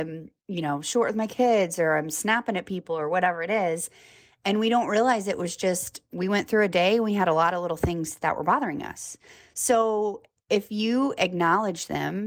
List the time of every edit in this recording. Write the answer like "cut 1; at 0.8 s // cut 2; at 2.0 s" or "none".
none